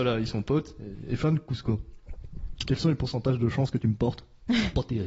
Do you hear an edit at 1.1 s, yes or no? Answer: no